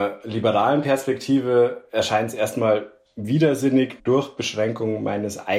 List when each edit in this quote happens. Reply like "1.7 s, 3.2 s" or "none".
4.0 s